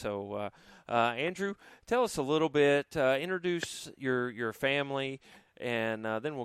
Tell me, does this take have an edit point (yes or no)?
no